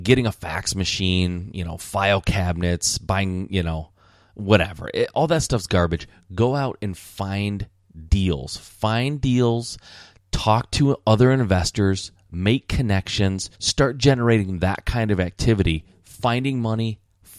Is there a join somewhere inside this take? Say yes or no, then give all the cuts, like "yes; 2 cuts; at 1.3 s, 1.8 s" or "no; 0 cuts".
yes; 1 cut; at 13.6 s